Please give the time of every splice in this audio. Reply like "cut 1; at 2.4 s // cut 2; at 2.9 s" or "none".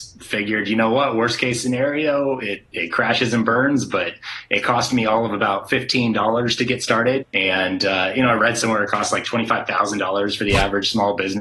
cut 1; at 7.2 s